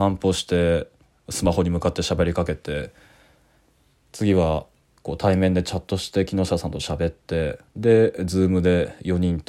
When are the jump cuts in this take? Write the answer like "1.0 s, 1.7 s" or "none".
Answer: 7.7 s